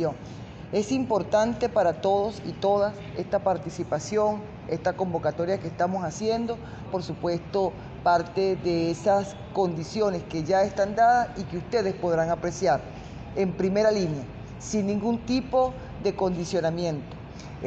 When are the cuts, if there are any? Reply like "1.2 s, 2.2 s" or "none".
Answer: 6.9 s